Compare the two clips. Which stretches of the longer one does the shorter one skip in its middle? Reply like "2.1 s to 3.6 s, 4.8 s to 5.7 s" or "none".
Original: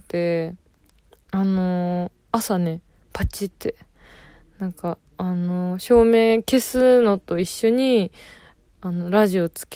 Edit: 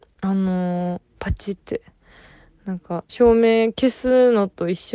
2.2 s to 3.0 s, 5.0 s to 5.8 s